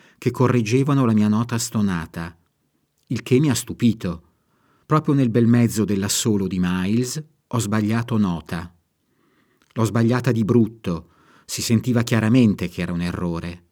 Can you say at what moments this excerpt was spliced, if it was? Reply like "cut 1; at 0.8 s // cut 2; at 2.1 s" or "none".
cut 1; at 4.8 s // cut 2; at 7.5 s